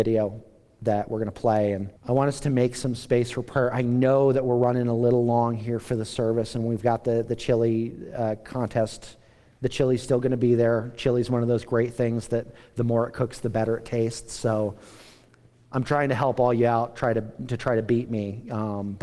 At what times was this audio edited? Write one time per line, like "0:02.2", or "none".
0:02.0